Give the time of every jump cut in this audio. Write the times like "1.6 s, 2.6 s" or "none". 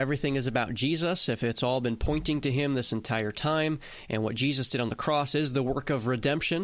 none